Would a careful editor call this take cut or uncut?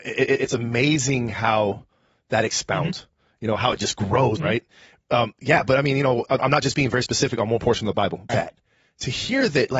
cut